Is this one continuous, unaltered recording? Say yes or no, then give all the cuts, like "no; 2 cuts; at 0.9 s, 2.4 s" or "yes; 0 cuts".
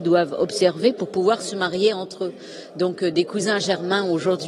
yes; 0 cuts